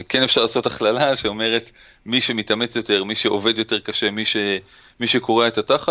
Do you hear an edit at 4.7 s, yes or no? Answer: no